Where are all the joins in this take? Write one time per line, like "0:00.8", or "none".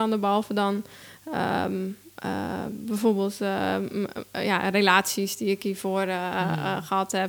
none